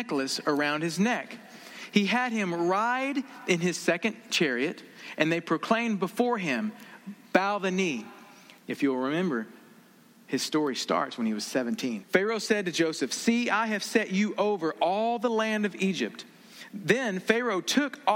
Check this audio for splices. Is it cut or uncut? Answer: cut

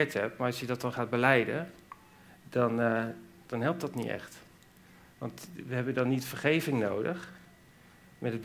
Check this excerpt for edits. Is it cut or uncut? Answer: uncut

